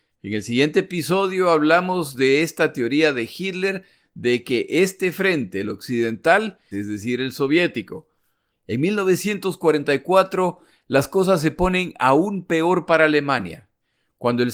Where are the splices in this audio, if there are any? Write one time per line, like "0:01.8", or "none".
0:06.7
0:08.5

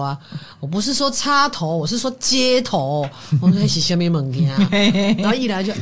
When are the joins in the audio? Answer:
none

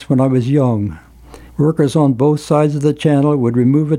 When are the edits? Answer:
0:01.5

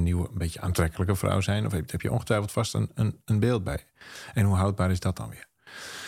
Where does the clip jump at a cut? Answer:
none

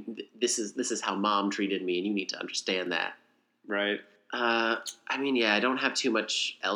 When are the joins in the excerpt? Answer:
none

